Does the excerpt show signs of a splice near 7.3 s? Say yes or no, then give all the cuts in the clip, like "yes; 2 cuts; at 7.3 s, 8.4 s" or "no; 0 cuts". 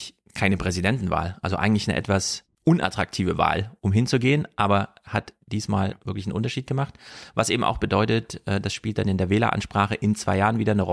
no; 1 cut; at 2.5 s